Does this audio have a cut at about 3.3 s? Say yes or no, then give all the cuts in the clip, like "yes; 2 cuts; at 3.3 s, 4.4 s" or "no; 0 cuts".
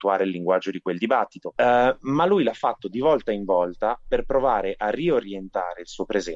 no; 1 cut; at 1.6 s